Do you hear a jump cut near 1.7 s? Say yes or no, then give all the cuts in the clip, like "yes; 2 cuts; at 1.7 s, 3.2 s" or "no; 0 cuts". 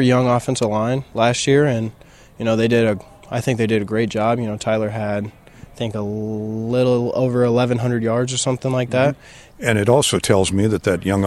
no; 1 cut; at 9.5 s